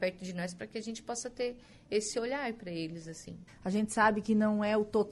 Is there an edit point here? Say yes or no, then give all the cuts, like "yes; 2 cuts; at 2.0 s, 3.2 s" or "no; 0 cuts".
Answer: yes; 1 cut; at 3.5 s